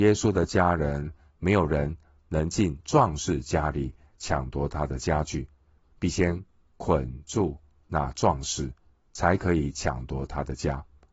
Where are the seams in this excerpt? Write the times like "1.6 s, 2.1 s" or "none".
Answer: 1.4 s